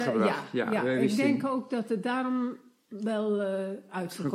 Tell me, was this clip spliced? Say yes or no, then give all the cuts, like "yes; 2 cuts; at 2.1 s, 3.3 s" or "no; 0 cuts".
no; 0 cuts